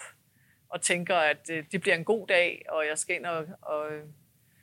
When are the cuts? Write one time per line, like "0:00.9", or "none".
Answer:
0:03.6